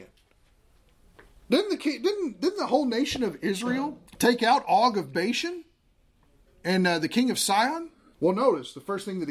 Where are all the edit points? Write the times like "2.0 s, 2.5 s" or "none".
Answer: 4.1 s, 8.1 s

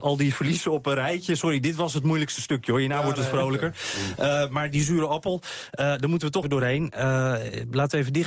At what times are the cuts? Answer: 6.4 s

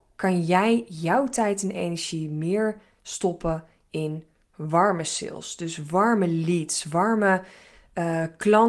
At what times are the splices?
none

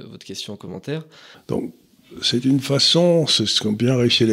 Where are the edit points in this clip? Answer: 1.3 s

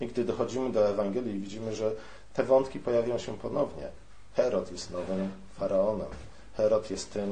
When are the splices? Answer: none

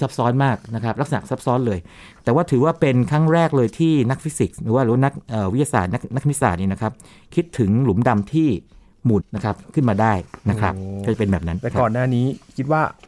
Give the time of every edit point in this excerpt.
9.2 s

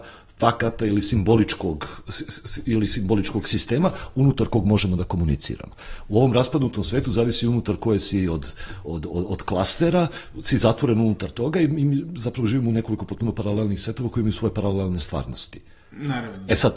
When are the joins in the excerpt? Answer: 8.8 s

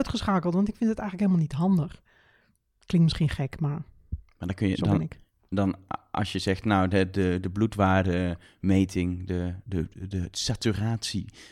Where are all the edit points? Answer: none

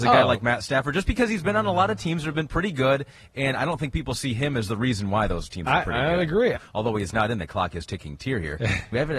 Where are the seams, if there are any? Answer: 6.5 s

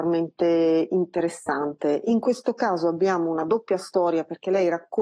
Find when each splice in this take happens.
none

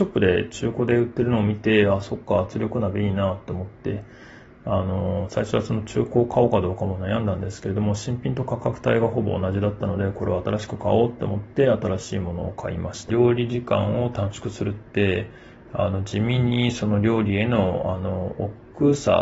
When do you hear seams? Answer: 13.1 s

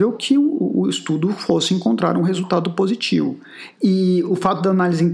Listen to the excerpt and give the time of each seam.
3.7 s

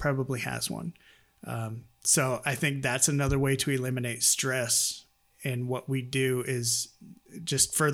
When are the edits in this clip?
none

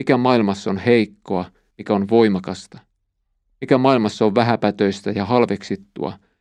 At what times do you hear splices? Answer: 1.7 s

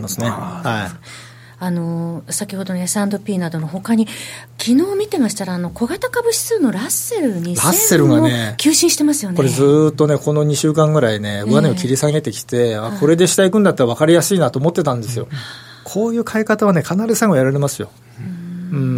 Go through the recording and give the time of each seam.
15.3 s

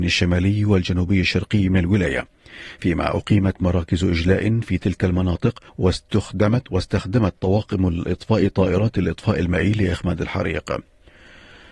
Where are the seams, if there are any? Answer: 5.7 s

